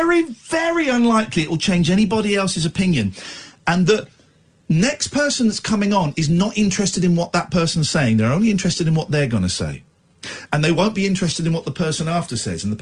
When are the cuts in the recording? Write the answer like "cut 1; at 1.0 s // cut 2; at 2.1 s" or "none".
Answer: none